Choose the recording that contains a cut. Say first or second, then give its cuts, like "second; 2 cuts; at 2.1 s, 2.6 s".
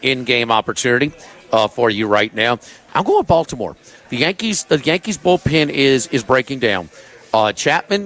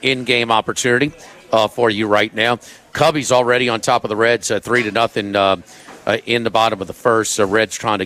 first; 1 cut; at 2.9 s